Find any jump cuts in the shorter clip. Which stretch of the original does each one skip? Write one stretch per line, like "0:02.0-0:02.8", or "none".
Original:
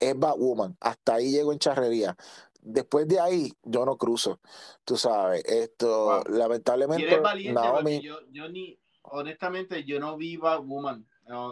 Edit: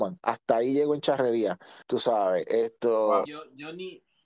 0:02.4-0:04.8
0:06.2-0:08.0